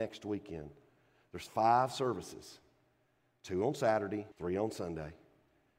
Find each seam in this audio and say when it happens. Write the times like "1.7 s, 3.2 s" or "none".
4.3 s